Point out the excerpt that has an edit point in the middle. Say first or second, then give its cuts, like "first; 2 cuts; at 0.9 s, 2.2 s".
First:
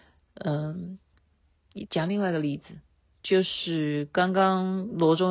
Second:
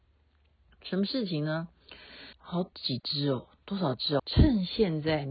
second; 2 cuts; at 2.3 s, 4.2 s